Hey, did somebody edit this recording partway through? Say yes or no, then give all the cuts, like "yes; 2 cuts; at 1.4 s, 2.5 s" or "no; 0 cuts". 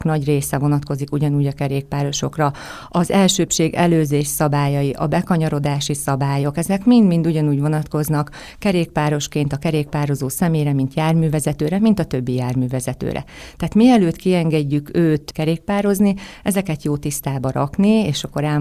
no; 0 cuts